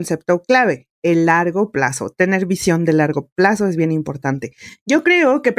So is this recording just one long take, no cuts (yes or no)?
yes